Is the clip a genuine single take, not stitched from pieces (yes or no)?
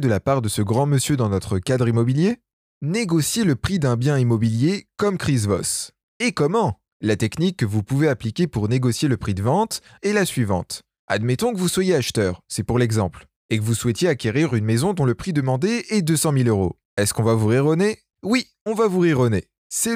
no